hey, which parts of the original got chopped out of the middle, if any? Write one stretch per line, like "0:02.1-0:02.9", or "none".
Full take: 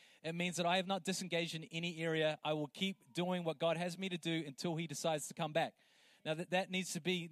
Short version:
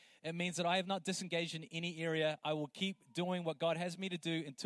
none